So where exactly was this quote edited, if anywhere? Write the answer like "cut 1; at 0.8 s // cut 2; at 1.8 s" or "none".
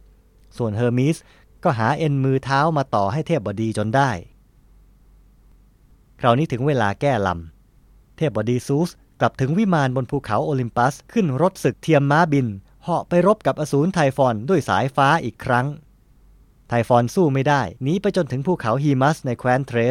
cut 1; at 11.0 s // cut 2; at 17.8 s